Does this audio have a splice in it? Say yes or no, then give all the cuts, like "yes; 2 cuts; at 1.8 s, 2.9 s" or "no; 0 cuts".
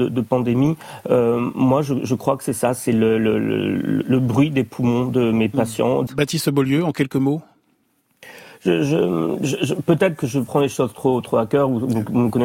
yes; 1 cut; at 6.1 s